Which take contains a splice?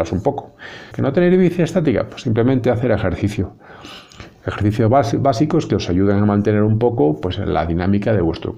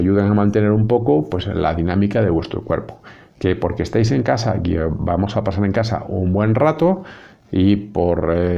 first; 1 cut; at 0.9 s

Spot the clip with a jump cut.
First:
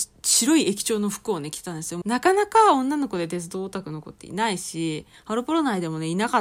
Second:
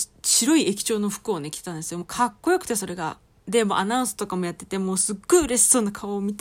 first; 1 cut; at 2.0 s

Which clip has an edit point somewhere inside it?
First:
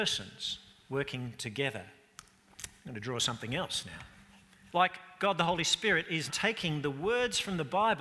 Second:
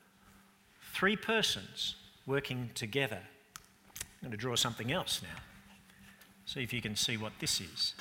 first; 2 cuts; at 4.7 s, 6.3 s

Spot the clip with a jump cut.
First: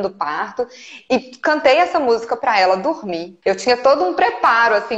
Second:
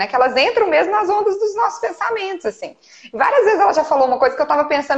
first; 1 cut; at 3.4 s

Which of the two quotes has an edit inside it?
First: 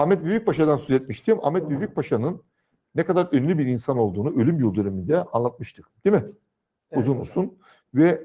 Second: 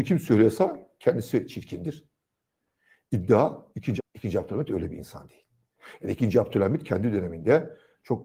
second; 1 cut; at 4.0 s

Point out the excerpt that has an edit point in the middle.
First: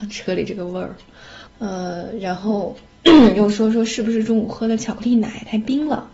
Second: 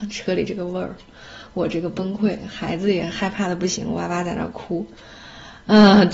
first; 1 cut; at 1.5 s

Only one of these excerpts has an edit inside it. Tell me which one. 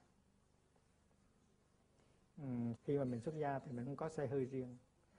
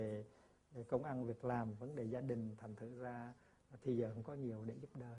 first; 1 cut; at 2.7 s

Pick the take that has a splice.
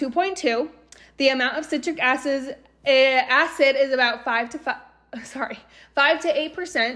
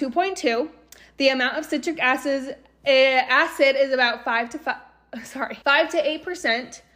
second; 1 cut; at 5.6 s

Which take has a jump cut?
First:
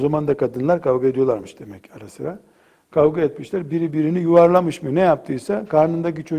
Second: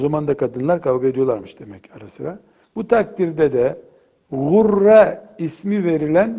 second; 1 cut; at 2.6 s

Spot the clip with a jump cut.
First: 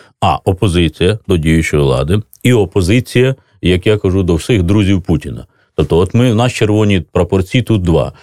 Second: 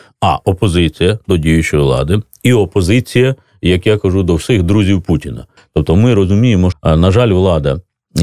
second; 2 cuts; at 5.6 s, 6.7 s

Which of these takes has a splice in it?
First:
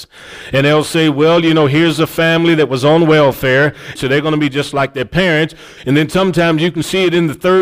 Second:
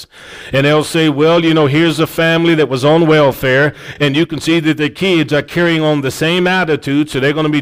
first; 1 cut; at 4.0 s

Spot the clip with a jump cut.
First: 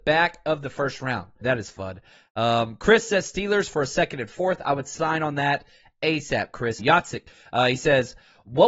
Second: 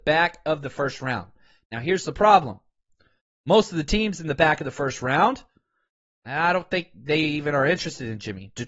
first; 2 cuts; at 1.4 s, 6.8 s

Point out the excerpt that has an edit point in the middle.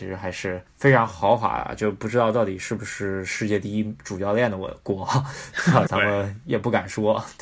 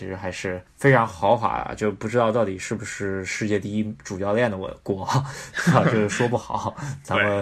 first; 1 cut; at 5.8 s

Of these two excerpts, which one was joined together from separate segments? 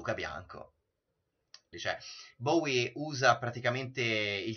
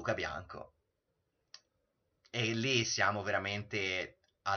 first; 1 cut; at 1.7 s

